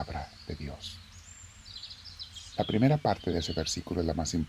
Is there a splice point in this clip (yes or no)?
no